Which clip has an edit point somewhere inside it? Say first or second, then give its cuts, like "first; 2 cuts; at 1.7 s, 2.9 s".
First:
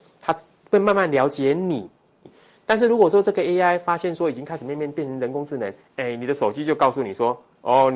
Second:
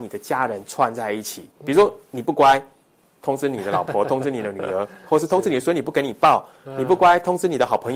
first; 2 cuts; at 2.2 s, 5.8 s